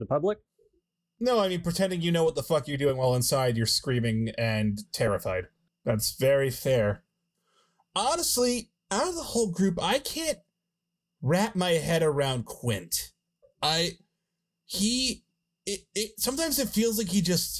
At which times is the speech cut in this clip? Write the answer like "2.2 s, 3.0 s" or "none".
5.7 s